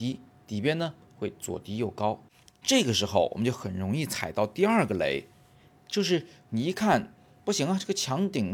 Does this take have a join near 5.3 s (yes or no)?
no